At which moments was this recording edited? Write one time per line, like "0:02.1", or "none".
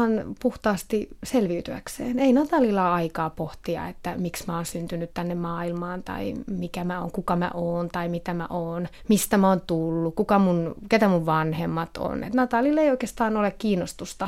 0:06.4